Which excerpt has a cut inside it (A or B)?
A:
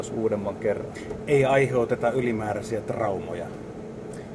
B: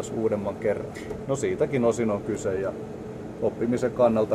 B